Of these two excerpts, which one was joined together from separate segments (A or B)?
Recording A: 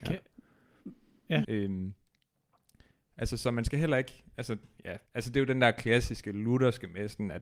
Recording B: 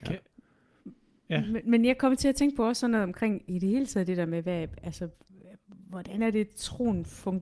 A